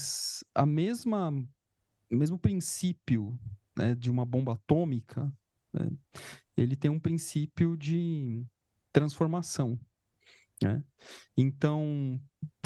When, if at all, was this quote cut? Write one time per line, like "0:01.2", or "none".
0:11.3

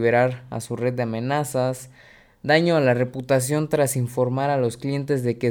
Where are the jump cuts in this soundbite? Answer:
none

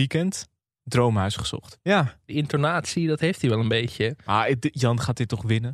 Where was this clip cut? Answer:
0:01.8

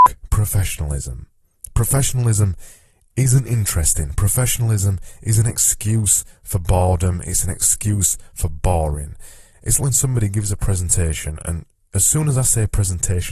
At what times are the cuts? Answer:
0:09.8

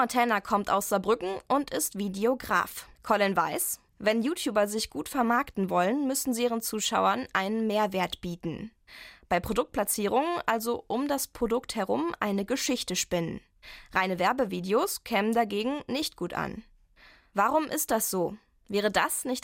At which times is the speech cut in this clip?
0:02.9

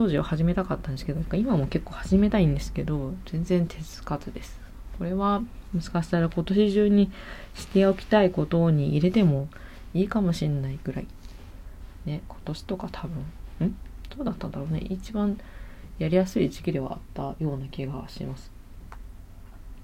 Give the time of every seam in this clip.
none

